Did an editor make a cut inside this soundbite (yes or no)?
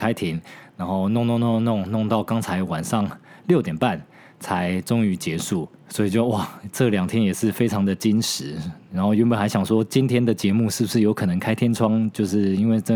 no